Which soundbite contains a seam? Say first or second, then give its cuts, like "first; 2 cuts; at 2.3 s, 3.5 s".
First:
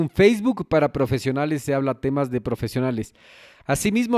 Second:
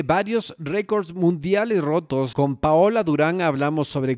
second; 1 cut; at 2.3 s